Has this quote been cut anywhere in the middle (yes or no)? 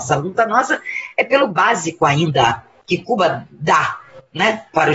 no